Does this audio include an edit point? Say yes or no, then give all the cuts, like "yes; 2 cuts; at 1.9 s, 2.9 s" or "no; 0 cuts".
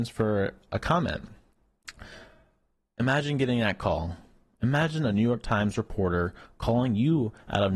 no; 0 cuts